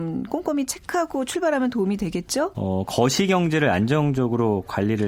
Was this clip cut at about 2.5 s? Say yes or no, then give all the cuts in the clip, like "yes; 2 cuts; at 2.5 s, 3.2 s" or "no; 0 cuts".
yes; 1 cut; at 2.5 s